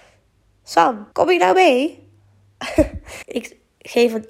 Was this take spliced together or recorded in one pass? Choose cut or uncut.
cut